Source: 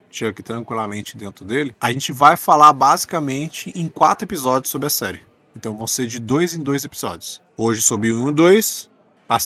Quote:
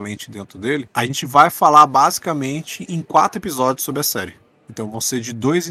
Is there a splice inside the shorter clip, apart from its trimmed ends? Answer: no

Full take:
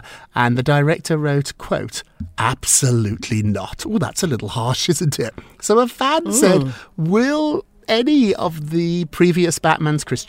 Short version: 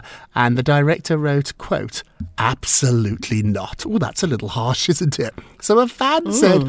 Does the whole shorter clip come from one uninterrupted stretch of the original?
yes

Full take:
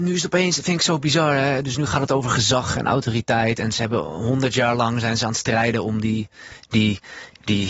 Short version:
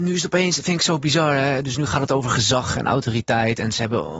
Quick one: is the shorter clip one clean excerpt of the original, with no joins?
yes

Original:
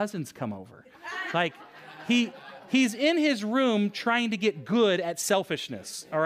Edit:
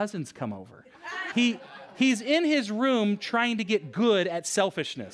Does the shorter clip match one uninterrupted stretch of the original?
no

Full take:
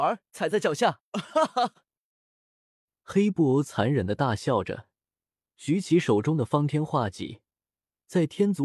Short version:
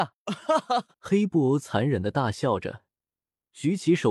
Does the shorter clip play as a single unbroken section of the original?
no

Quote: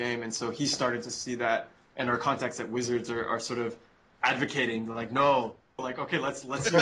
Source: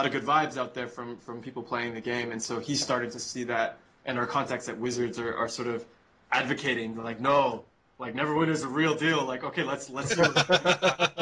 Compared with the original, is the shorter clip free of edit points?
no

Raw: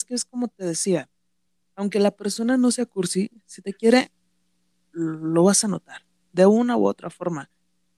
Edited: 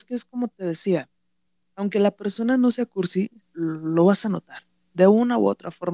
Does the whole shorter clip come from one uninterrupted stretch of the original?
no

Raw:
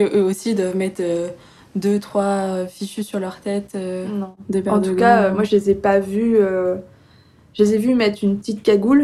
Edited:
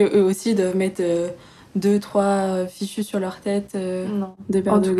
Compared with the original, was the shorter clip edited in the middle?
no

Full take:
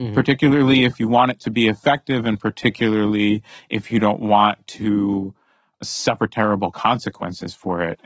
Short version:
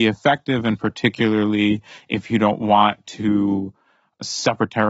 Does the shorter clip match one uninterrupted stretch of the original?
yes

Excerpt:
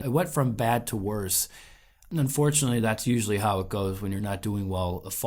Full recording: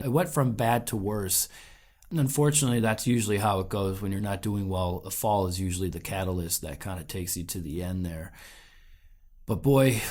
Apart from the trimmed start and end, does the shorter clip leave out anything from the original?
no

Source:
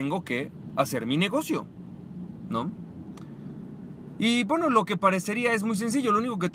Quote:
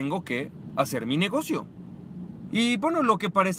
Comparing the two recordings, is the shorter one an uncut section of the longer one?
no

